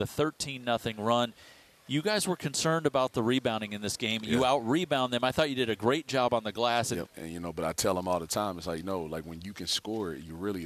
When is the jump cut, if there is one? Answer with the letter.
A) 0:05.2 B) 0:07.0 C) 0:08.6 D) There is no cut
B